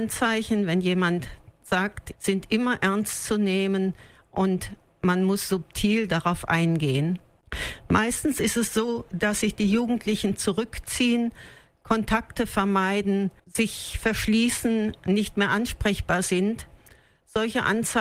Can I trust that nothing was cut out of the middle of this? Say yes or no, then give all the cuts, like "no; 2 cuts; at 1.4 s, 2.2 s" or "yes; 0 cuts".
no; 2 cuts; at 2.1 s, 13.4 s